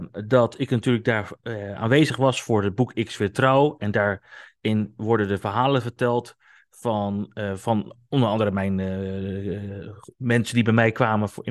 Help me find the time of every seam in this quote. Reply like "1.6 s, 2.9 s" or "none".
none